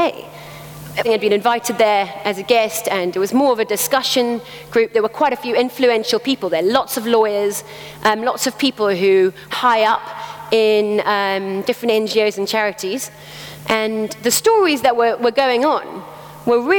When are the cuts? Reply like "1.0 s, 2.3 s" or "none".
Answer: 1.0 s, 9.5 s